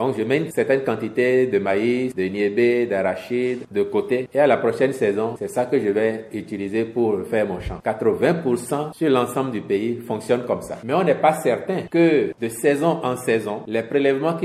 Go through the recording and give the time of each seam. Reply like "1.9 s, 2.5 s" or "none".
none